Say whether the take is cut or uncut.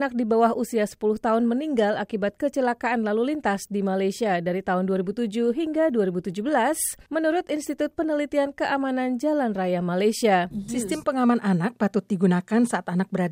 cut